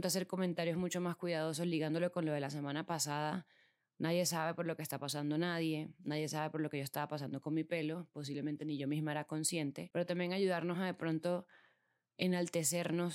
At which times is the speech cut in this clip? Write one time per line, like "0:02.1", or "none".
none